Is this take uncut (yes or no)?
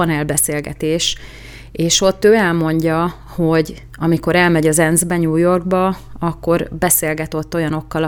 yes